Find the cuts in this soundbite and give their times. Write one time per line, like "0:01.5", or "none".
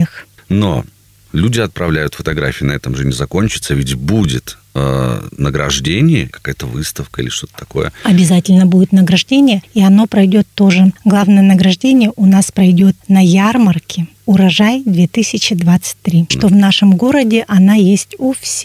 0:06.3
0:16.3